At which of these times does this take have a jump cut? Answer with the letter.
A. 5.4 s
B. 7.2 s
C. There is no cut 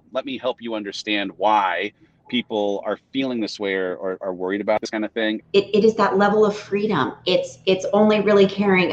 A